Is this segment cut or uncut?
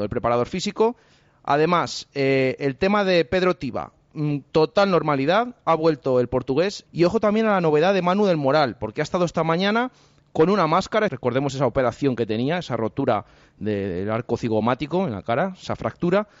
cut